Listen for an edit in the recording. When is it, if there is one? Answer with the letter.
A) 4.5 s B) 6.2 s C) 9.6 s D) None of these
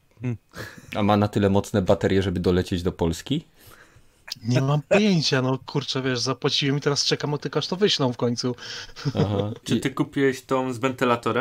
C